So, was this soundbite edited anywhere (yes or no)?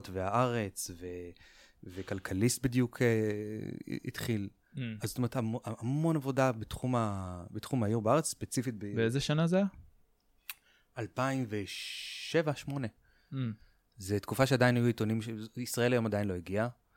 no